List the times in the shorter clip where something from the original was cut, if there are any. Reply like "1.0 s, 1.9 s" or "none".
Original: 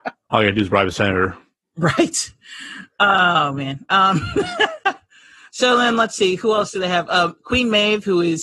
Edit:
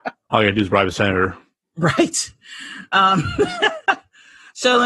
2.9 s